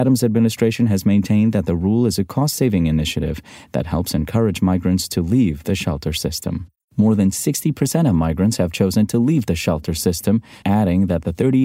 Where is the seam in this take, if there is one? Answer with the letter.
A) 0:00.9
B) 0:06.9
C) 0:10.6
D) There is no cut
C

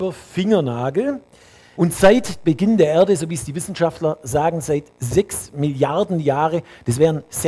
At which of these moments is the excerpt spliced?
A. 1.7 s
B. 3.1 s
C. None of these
A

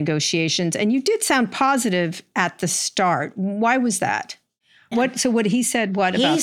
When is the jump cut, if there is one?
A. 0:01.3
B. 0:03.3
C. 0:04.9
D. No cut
C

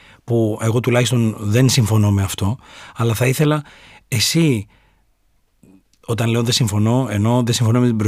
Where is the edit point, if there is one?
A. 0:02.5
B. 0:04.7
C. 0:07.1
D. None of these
D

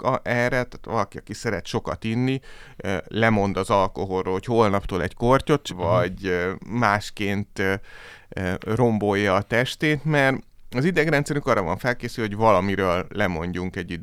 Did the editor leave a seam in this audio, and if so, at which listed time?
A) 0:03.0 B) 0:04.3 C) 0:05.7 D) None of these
C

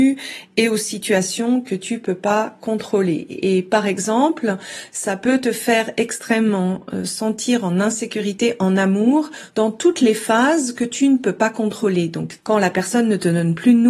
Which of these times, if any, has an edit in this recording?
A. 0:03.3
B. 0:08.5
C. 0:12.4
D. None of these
C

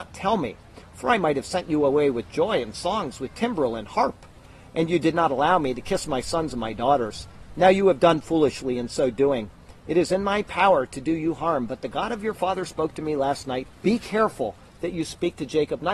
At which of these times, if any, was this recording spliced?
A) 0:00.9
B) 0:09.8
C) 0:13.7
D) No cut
C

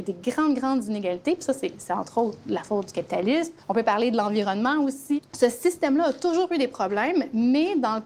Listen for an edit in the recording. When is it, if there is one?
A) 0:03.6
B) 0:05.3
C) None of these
C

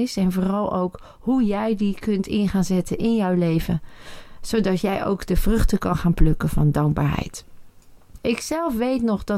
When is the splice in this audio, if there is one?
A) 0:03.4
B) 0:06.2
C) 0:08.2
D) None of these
C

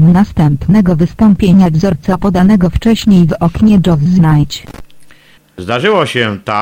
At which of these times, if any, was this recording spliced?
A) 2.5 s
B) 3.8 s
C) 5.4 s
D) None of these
C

